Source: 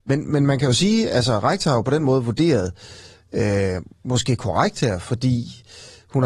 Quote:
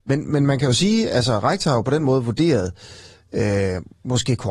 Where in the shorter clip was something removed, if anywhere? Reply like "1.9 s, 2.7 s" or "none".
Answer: none

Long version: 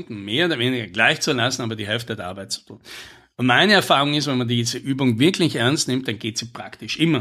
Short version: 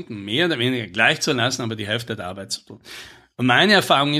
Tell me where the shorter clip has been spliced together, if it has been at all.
none

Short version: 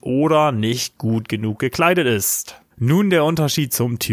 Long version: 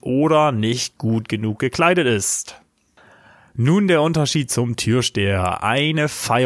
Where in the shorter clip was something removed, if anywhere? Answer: 2.7 s

